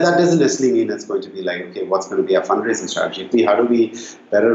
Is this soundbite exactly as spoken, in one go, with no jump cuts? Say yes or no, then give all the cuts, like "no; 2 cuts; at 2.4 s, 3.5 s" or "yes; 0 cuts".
no; 1 cut; at 3.3 s